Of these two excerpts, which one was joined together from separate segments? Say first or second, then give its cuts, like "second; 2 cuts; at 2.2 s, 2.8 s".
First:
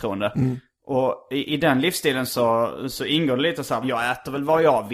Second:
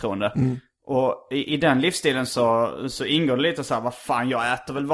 first; 1 cut; at 3.8 s